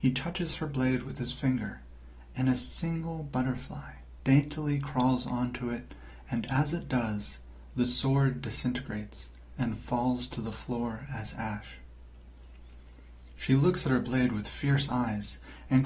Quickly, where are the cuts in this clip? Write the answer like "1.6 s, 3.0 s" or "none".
none

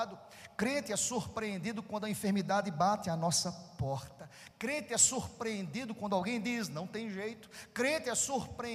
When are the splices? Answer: none

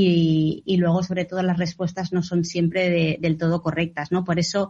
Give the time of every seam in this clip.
none

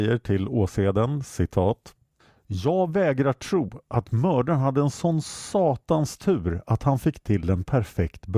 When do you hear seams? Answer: none

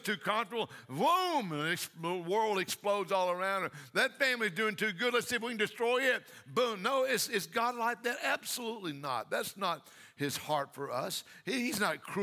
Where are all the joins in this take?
none

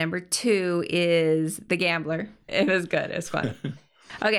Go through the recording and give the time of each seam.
2.5 s

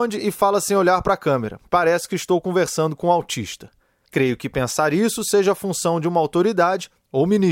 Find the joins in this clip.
4.1 s

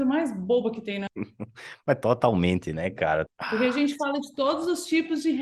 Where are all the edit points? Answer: 1.1 s, 3.3 s

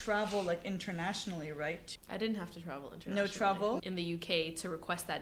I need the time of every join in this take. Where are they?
1.9 s, 3.8 s

